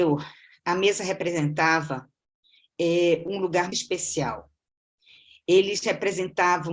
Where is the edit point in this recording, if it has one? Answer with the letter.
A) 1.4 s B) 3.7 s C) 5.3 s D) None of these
B